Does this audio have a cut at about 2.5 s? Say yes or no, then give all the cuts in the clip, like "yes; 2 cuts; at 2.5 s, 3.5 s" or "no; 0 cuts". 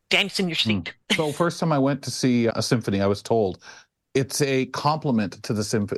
yes; 2 cuts; at 1.0 s, 2.5 s